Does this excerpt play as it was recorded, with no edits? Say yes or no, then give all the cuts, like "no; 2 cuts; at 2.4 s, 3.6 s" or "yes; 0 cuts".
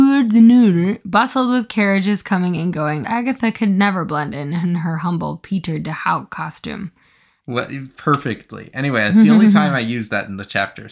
no; 2 cuts; at 3.0 s, 7.4 s